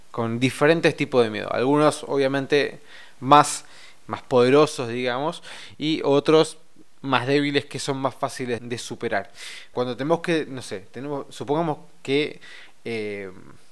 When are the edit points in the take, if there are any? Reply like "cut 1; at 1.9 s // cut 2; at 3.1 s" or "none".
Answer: cut 1; at 4.1 s // cut 2; at 8.6 s // cut 3; at 9.7 s